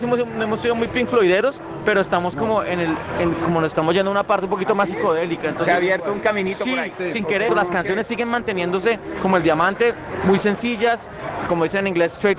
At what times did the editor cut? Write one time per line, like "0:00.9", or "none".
0:07.5
0:11.5